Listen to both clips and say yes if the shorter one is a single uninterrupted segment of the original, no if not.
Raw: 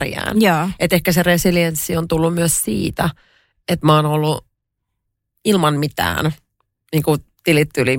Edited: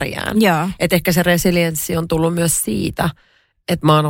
yes